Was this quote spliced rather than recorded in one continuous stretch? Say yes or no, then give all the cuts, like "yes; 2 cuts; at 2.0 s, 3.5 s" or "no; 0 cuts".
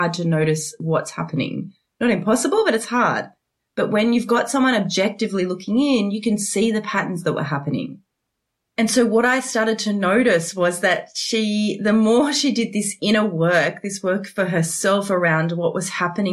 no; 0 cuts